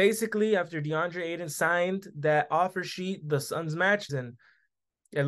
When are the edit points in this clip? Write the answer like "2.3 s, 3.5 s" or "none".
4.1 s